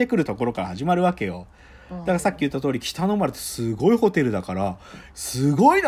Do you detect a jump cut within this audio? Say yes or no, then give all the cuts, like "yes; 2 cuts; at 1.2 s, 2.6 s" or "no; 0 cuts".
no; 0 cuts